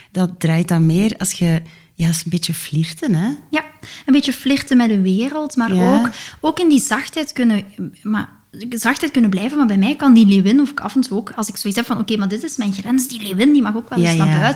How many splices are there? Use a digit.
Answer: 0